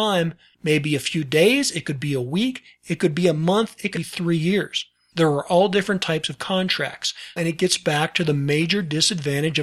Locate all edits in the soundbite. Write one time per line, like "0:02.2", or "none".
0:03.9
0:07.4